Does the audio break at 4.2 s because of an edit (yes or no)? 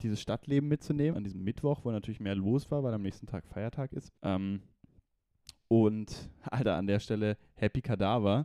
yes